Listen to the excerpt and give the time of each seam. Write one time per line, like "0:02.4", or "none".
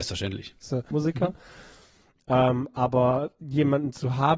0:00.9